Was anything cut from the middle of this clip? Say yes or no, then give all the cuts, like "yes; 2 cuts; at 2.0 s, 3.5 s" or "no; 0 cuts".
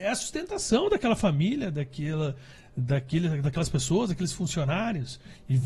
no; 0 cuts